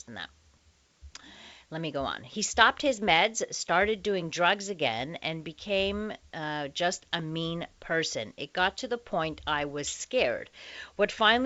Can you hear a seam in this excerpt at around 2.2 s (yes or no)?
no